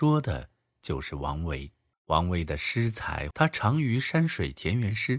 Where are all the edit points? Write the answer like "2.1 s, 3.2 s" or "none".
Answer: 1.9 s, 3.3 s